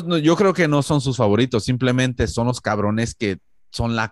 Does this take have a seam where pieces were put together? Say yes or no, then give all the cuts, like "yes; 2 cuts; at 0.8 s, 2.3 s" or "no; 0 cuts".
no; 0 cuts